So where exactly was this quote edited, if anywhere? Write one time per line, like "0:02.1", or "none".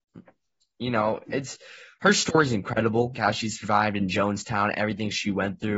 0:03.1